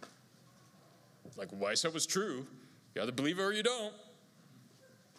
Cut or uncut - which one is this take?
cut